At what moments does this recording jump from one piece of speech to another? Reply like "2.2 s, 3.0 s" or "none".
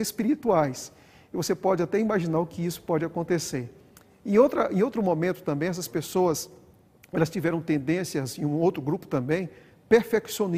none